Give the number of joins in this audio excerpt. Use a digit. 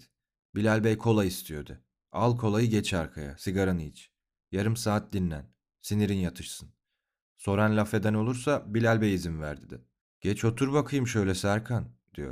1